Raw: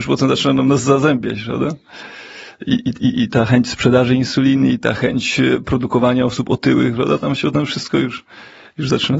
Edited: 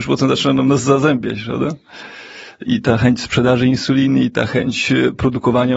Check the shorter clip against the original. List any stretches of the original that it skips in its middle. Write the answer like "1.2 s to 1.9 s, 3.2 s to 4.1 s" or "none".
2.7 s to 3.1 s